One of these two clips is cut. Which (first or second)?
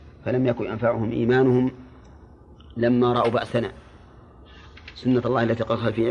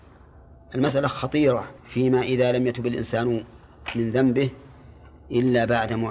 second